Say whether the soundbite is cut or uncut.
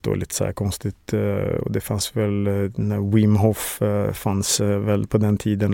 uncut